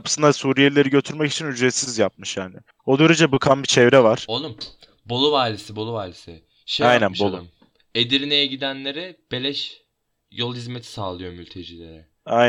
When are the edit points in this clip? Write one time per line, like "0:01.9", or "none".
none